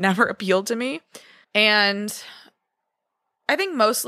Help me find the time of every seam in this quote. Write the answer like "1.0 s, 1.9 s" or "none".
1.4 s